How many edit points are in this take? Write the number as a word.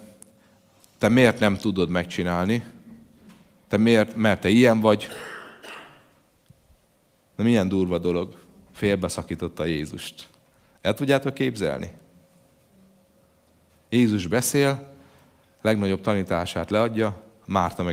one